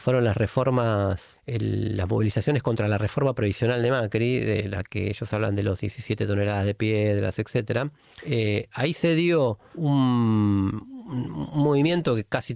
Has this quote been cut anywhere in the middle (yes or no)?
no